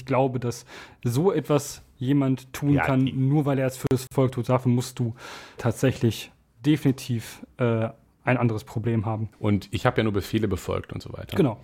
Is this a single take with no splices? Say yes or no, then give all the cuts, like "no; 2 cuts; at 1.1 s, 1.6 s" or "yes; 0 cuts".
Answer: no; 2 cuts; at 5.6 s, 9.3 s